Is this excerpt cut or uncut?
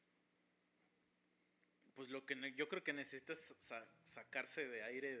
uncut